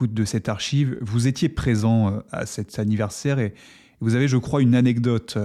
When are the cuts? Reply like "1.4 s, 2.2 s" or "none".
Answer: none